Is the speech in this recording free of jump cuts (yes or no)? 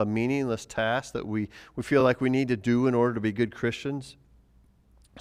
yes